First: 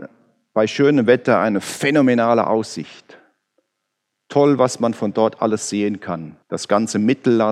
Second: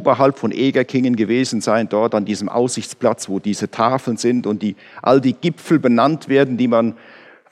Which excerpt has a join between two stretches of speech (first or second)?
first